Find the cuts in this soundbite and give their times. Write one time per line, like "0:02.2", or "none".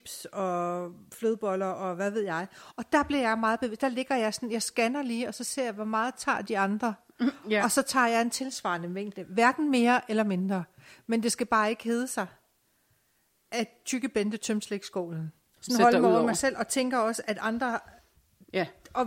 0:15.6